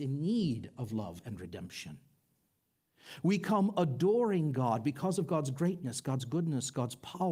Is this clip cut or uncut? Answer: uncut